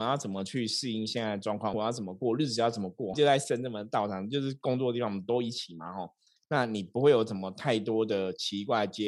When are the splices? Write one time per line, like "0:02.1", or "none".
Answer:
0:01.7
0:03.1
0:06.4